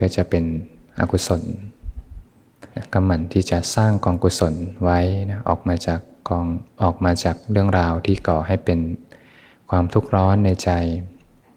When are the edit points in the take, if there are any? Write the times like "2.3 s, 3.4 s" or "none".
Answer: 2.7 s